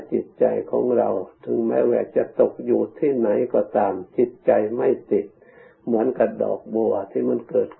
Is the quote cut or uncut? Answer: uncut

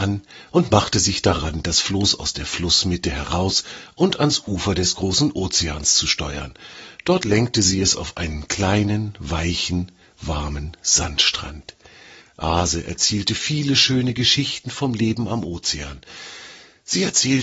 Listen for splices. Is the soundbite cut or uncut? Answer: cut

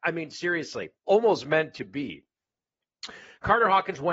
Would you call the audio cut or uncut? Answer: cut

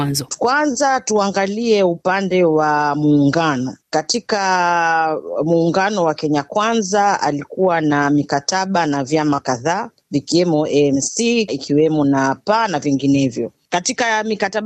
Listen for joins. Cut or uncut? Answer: cut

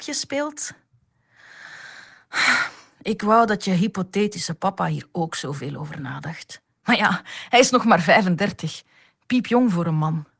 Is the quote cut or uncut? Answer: uncut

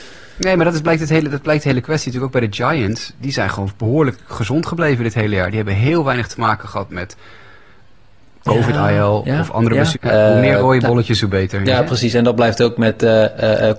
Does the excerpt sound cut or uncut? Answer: cut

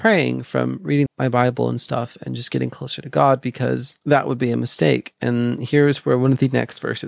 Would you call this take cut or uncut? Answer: cut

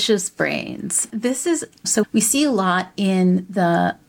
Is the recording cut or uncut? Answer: cut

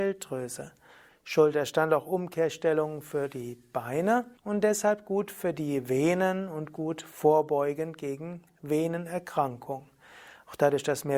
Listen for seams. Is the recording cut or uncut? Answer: cut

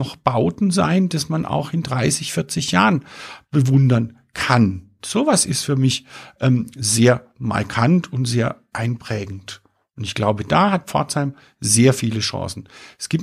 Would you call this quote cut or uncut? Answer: uncut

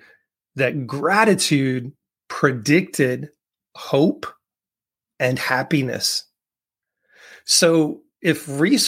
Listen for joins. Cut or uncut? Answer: uncut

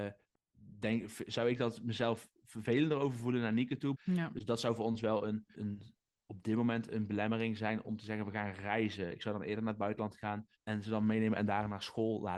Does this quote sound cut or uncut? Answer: cut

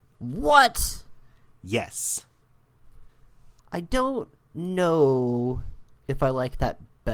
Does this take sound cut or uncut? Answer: cut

